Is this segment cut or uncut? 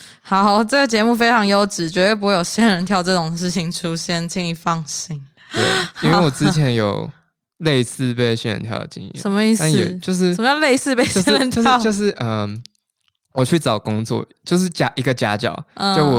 uncut